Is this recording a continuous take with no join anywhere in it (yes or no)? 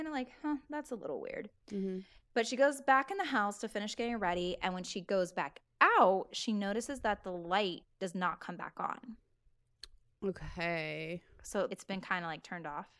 no